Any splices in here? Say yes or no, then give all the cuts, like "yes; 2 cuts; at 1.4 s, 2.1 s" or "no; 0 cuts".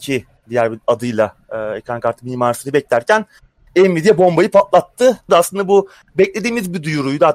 yes; 1 cut; at 5.3 s